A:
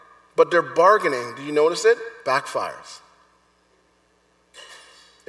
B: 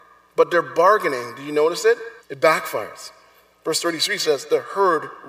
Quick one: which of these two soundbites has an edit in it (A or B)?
B